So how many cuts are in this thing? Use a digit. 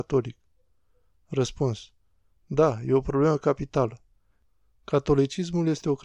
0